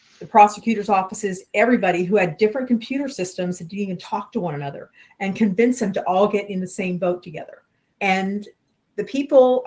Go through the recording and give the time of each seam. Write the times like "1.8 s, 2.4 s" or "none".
7.9 s